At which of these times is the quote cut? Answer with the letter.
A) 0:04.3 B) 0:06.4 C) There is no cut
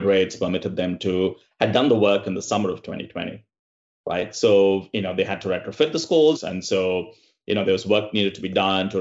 B